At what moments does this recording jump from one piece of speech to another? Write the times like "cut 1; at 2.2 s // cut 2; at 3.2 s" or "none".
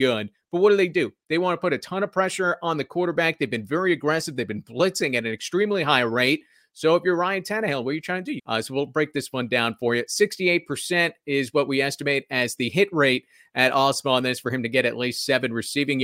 cut 1; at 8.4 s

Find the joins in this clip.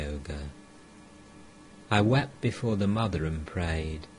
none

